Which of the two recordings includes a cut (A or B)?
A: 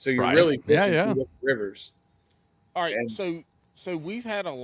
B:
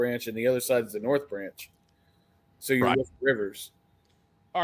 B